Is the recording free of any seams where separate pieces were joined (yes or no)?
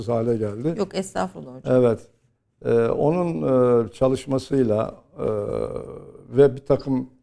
yes